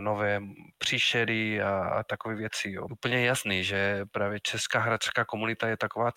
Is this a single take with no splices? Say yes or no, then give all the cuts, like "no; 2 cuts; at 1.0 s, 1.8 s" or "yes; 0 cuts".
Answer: no; 1 cut; at 2.9 s